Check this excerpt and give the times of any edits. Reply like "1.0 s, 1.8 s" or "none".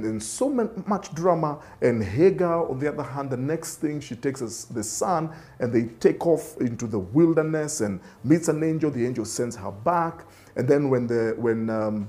none

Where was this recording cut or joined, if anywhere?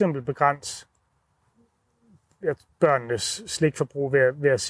none

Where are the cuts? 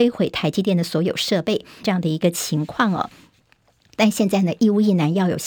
1.8 s

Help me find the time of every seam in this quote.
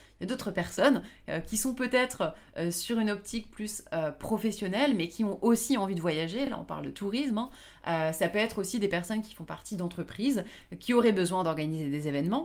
none

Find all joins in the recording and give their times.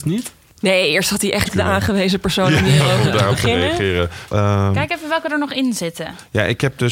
1.5 s, 4.3 s

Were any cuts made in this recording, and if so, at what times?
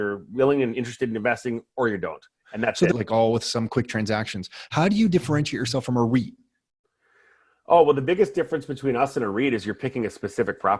2.9 s

